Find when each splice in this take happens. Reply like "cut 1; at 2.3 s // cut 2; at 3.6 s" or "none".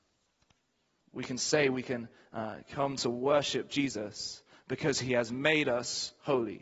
cut 1; at 1.0 s